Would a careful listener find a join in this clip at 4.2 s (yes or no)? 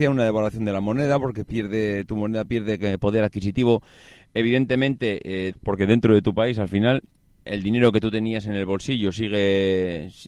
no